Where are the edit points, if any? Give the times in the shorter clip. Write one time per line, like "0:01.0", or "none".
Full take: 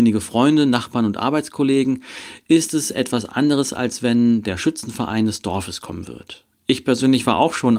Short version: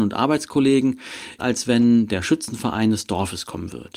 0:01.4